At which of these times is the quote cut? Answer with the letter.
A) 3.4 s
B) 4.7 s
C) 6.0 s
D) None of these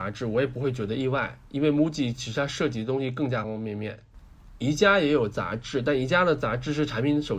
A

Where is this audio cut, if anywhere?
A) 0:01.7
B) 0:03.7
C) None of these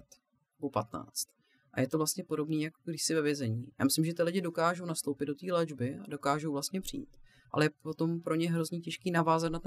B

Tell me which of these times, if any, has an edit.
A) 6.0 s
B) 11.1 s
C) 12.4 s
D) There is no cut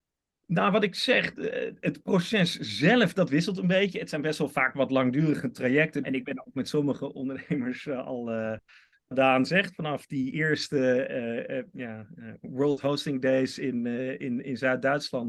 A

